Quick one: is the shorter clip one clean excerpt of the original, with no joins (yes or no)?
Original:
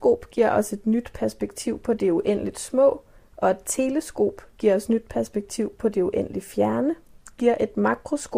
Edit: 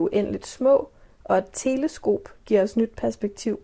yes